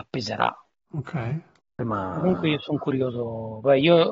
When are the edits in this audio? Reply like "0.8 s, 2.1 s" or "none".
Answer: none